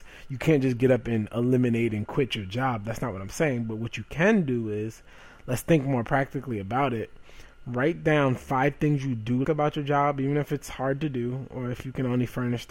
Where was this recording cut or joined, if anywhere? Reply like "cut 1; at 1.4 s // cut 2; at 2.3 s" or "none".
cut 1; at 9.4 s